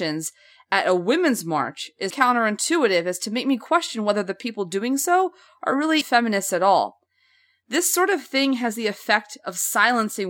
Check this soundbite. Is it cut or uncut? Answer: cut